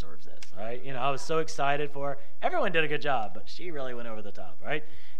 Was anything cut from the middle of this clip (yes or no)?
no